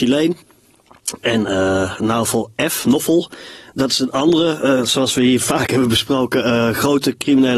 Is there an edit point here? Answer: no; 0 cuts

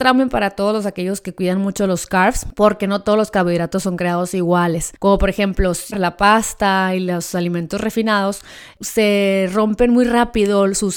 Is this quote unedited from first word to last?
no; 1 cut; at 5.9 s

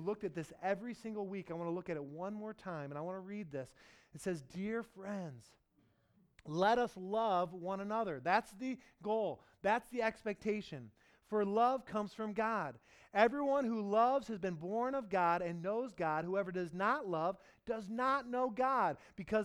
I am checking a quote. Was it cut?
no; 0 cuts

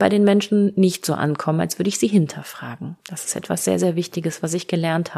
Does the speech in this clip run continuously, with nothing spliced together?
yes; 0 cuts

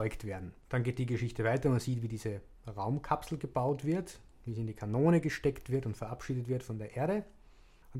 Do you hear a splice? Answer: no; 0 cuts

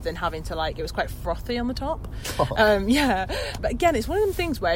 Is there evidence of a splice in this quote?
yes; 1 cut; at 3.6 s

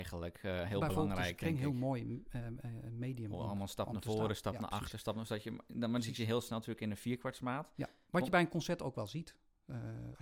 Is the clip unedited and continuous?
yes; 0 cuts

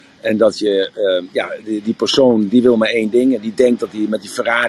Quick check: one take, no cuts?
yes; 0 cuts

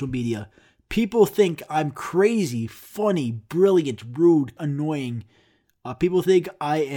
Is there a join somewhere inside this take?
yes; 1 cut; at 4.6 s

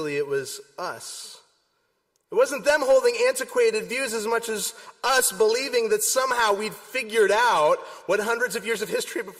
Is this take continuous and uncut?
yes; 0 cuts

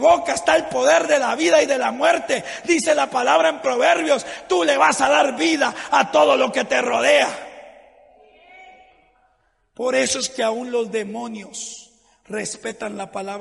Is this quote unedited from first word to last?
yes; 0 cuts

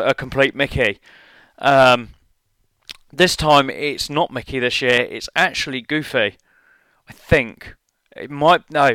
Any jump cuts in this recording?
no; 0 cuts

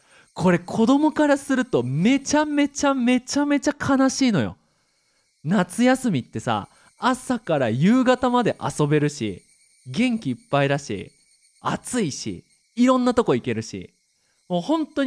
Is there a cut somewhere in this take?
no; 0 cuts

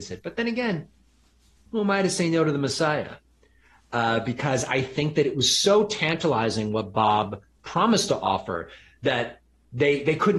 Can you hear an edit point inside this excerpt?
no; 0 cuts

